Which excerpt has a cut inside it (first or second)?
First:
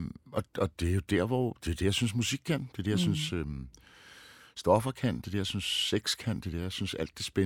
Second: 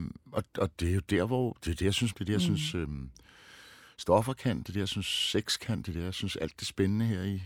second